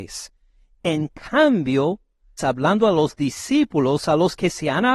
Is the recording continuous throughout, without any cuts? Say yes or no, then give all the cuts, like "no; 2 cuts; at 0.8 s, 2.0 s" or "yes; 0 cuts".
no; 1 cut; at 2.4 s